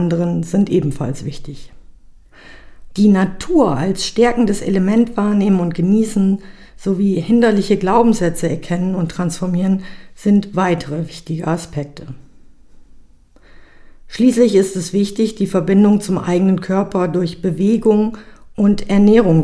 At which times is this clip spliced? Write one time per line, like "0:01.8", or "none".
0:02.9